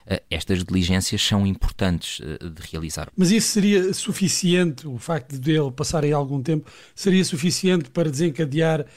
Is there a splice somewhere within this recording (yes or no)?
yes